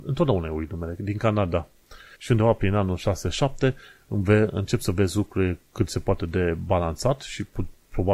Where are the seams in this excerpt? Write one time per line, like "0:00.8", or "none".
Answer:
0:02.1